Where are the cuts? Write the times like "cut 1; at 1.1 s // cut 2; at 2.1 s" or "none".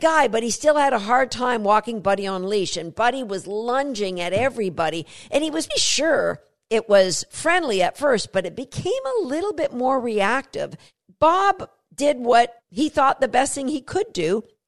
cut 1; at 5.7 s